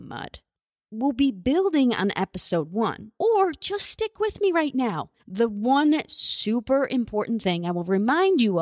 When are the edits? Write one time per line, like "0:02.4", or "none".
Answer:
0:03.2
0:05.2